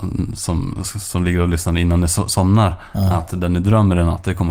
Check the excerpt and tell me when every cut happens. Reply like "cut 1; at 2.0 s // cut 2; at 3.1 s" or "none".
none